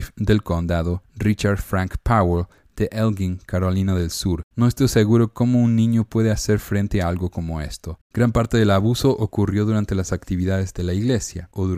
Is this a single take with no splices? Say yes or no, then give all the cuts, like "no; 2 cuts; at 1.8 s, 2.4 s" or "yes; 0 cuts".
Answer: no; 2 cuts; at 4.5 s, 8.0 s